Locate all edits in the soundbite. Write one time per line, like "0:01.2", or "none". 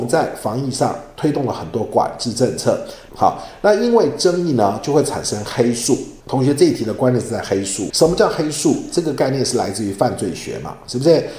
0:03.1
0:06.2
0:07.9